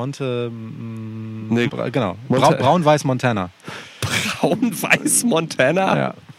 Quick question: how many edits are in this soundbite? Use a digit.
1